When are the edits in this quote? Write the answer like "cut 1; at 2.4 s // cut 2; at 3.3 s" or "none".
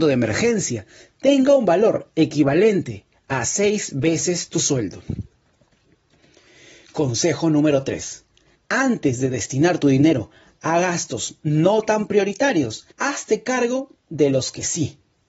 cut 1; at 8.5 s // cut 2; at 12.9 s